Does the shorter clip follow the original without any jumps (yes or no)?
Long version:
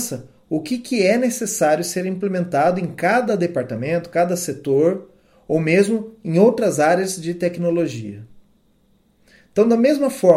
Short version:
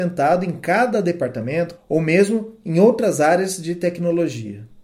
no